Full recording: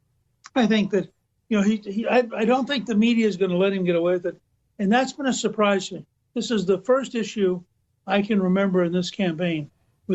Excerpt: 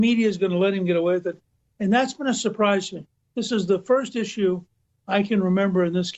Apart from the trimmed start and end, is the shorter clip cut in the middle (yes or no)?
no